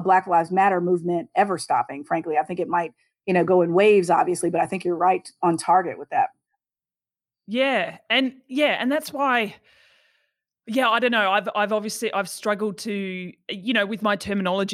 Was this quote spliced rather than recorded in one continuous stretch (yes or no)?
no